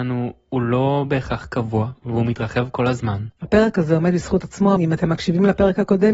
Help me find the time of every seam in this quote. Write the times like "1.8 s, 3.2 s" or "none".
3.4 s, 4.8 s